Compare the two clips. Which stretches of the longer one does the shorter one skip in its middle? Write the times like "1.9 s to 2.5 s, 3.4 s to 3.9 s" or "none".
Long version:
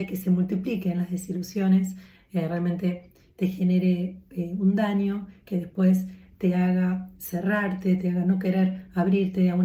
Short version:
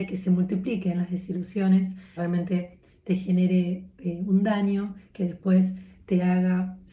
2.2 s to 2.5 s